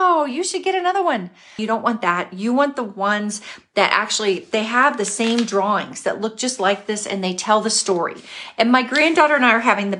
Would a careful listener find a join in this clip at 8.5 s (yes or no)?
no